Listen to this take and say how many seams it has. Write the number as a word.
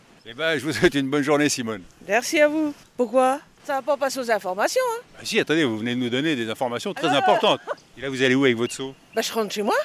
two